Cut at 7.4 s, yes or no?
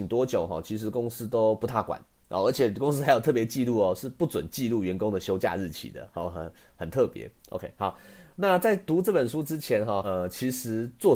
yes